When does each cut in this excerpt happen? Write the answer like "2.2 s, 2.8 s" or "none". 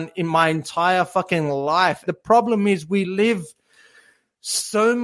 2.0 s